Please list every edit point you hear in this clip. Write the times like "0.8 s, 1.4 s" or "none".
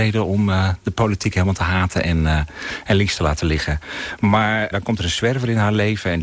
4.7 s